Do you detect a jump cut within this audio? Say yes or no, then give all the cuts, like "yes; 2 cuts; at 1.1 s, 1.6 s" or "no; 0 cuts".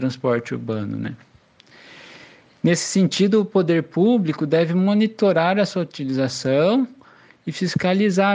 no; 0 cuts